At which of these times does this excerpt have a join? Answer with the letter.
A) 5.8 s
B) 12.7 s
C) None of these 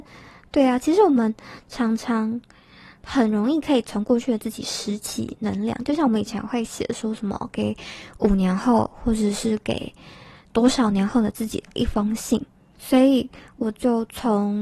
B